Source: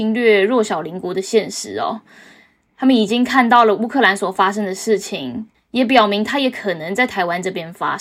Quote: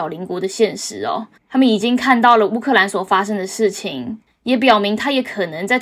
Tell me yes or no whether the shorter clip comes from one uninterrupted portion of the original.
no